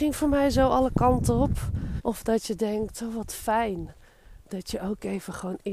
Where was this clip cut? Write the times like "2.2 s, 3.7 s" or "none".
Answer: 2.0 s